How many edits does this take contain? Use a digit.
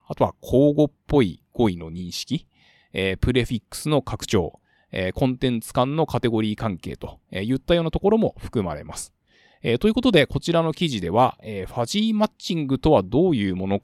0